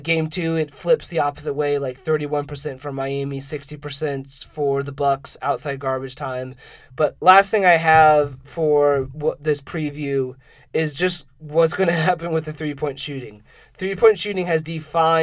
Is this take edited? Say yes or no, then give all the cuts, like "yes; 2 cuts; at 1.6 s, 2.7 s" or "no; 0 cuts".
yes; 1 cut; at 6.8 s